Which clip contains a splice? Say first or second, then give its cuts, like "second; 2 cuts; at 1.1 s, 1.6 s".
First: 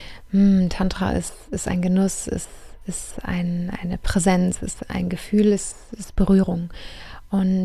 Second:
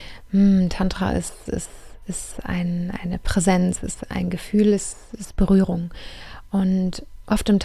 second; 1 cut; at 1.5 s